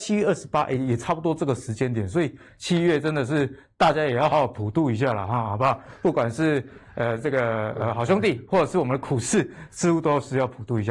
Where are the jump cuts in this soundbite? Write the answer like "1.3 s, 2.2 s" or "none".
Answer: 4.3 s